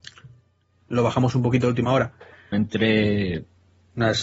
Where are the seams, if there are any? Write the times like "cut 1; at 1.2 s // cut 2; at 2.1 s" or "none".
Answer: cut 1; at 2.5 s